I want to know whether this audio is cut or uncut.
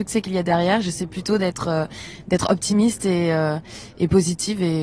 uncut